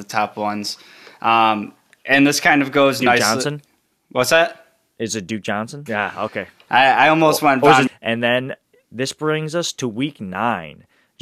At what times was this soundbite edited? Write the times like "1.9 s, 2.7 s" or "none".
5.9 s, 7.9 s